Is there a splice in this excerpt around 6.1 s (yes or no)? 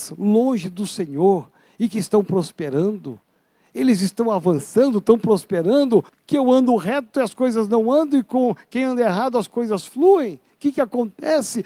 yes